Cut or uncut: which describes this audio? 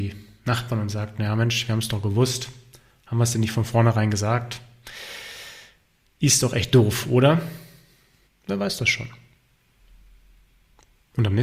cut